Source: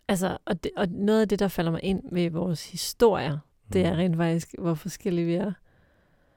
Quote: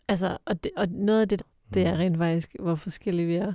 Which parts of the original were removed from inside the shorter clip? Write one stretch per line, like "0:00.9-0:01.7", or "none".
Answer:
0:01.4-0:03.4